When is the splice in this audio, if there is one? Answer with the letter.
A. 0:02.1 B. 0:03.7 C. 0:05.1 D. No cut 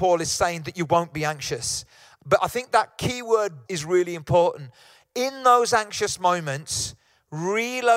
B